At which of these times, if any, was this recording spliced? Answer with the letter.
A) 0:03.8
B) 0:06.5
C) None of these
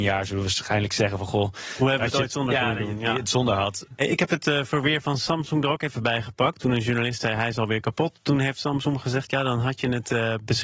A